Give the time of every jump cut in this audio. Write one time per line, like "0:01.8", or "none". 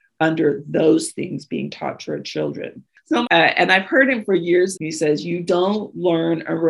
0:03.2
0:04.7